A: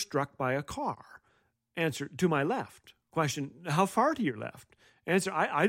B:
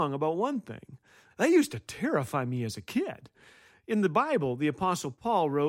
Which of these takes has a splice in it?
B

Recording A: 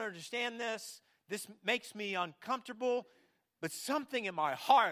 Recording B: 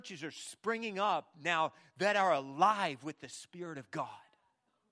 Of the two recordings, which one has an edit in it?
A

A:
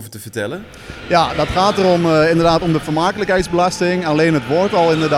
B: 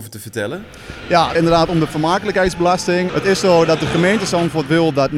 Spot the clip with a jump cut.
B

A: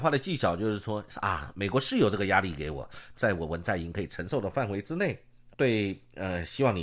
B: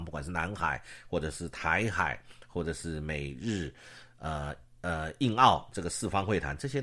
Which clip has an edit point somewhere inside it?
A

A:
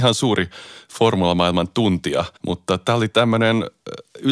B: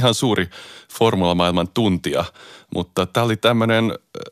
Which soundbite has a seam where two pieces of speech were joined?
A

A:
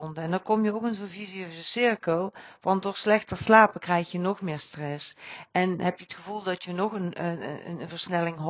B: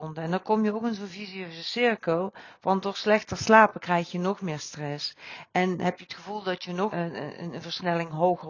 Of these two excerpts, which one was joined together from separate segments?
B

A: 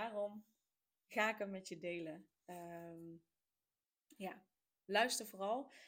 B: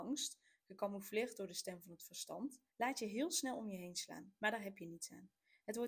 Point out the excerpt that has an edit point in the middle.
B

